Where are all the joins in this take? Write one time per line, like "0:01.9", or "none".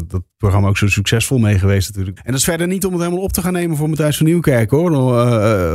0:02.2